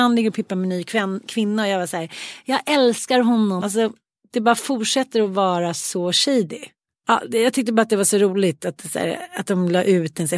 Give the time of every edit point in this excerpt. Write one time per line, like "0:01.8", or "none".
0:03.6